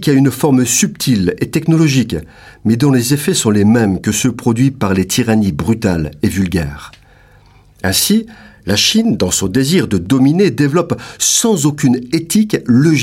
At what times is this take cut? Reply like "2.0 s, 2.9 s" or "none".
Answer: none